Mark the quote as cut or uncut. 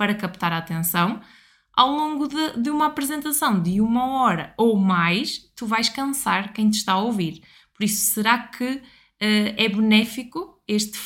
uncut